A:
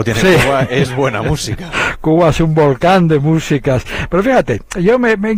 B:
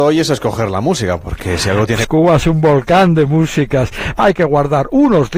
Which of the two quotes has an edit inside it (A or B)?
B